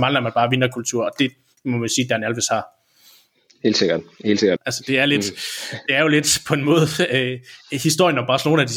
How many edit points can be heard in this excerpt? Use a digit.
1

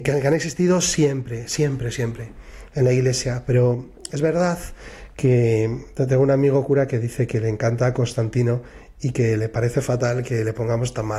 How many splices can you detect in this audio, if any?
0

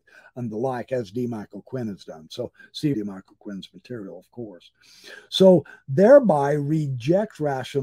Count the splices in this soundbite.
1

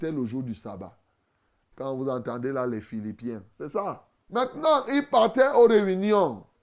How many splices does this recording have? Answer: 2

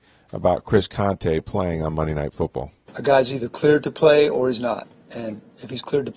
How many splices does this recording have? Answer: 0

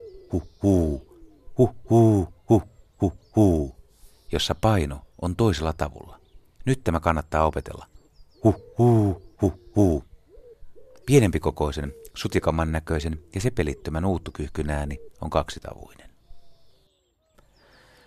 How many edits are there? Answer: 2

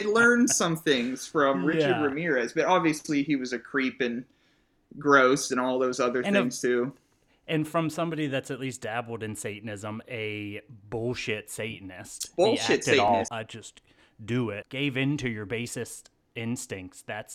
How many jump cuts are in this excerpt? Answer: 2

